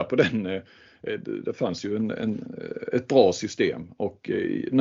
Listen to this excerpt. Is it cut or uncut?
uncut